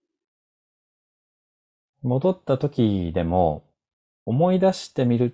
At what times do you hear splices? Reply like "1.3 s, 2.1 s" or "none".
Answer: none